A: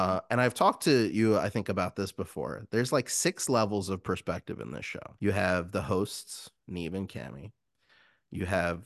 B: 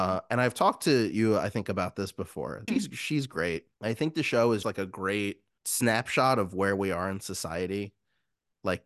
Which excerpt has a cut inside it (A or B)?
B